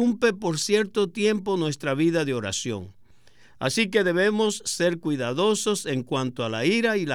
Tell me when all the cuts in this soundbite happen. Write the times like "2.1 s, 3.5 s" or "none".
none